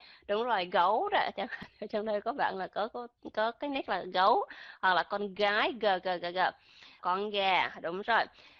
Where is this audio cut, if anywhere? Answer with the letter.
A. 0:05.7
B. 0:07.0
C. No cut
B